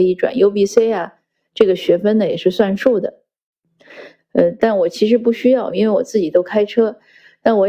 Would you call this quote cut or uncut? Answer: cut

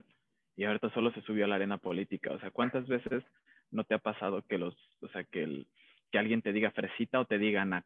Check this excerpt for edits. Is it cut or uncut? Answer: uncut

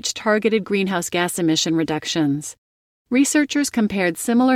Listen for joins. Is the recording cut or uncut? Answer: uncut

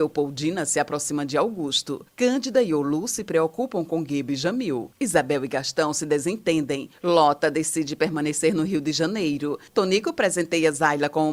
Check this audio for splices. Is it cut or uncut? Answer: uncut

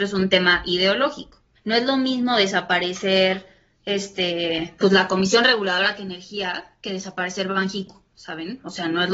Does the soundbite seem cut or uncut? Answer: cut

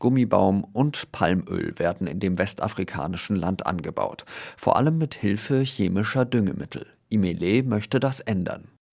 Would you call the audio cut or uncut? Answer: uncut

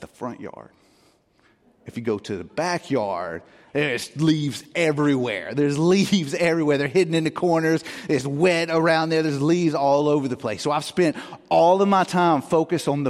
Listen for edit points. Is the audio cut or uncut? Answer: uncut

